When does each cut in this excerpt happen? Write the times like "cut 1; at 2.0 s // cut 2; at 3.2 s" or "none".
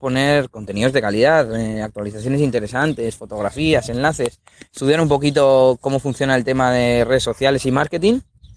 none